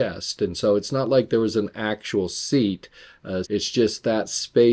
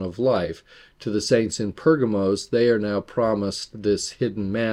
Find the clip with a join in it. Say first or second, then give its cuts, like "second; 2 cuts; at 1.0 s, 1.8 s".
first; 1 cut; at 3.4 s